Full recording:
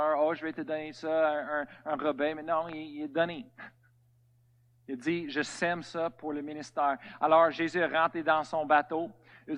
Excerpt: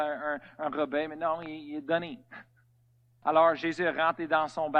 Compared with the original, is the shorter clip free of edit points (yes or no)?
no